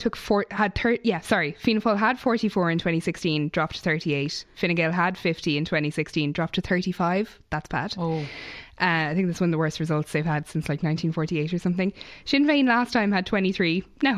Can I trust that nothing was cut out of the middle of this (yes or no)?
yes